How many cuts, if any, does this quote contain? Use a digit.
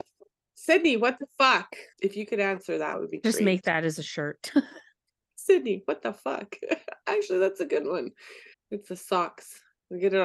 2